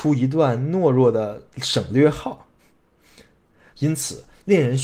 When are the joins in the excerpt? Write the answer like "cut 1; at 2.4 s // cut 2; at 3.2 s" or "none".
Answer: cut 1; at 3.7 s